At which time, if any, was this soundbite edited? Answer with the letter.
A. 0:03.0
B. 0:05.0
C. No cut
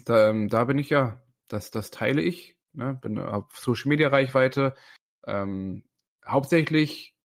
C